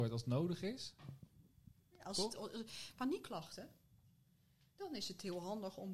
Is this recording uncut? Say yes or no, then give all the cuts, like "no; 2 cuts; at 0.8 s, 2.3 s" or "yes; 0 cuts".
no; 1 cut; at 2.9 s